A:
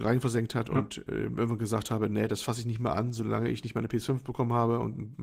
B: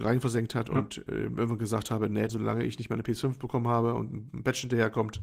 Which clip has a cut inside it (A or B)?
B